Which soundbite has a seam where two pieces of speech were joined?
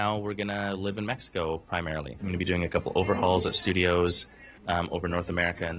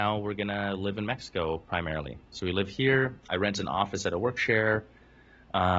first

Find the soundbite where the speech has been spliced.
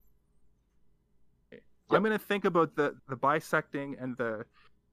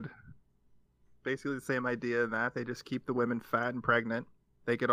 first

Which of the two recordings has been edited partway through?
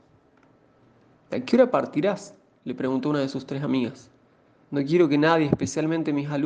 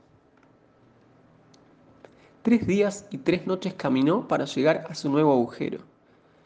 first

